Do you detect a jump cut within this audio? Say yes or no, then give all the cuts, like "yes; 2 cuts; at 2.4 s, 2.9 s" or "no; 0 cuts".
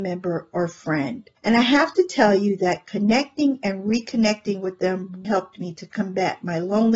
yes; 2 cuts; at 1.4 s, 5.2 s